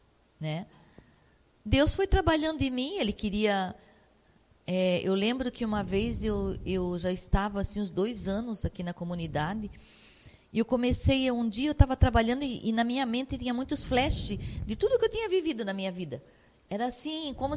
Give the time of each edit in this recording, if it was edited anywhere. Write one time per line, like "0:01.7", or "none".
none